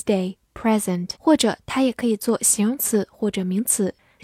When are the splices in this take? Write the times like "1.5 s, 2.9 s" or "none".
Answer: 1.2 s

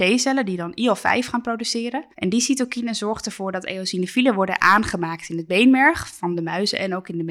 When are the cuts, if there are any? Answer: 2.1 s

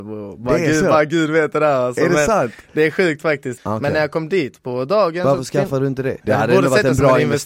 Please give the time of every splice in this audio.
3.6 s, 6.2 s

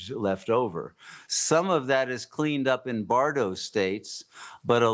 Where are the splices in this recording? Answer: none

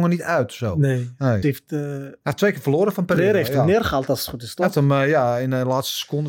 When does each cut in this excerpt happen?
1.4 s

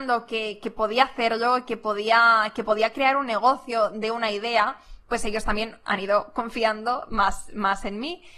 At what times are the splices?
none

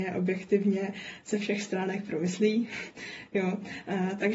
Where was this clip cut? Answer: none

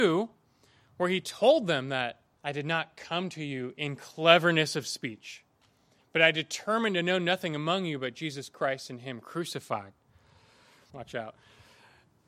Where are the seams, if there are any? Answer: 10.9 s

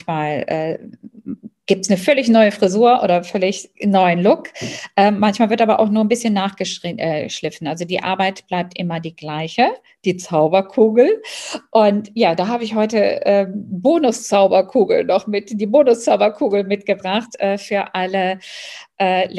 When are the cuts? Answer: none

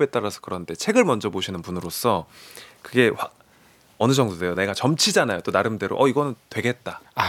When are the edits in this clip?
none

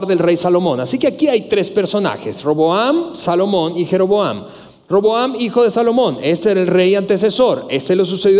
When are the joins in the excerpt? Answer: none

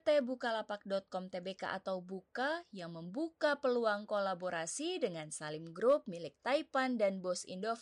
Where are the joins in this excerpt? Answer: none

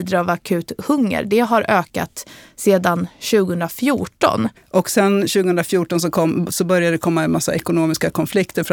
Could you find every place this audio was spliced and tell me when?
4.6 s

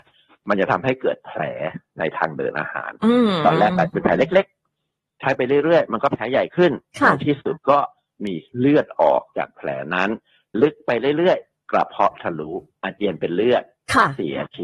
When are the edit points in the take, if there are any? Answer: 10.5 s

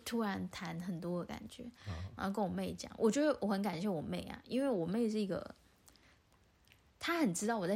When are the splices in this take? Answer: 2.2 s

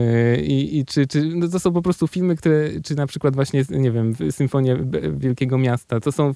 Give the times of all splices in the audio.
none

